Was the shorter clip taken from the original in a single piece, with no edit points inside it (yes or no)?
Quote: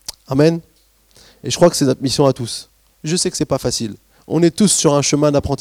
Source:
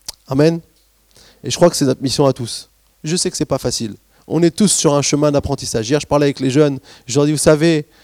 yes